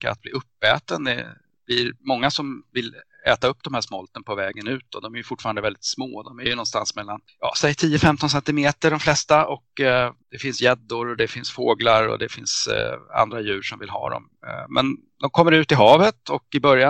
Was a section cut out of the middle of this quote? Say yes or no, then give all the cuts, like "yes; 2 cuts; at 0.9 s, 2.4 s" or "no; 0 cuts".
yes; 1 cut; at 10.2 s